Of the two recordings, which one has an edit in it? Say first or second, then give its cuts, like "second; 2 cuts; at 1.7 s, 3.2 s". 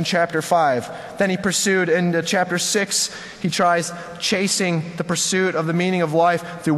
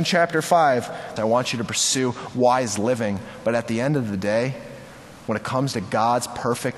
second; 1 cut; at 1.2 s